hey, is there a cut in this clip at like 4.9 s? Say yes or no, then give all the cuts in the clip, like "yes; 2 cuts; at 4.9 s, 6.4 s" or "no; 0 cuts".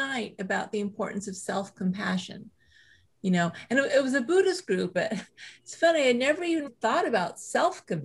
yes; 2 cuts; at 4.9 s, 6.7 s